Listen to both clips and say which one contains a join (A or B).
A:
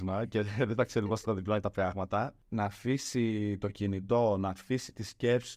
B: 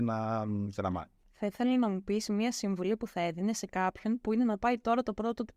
B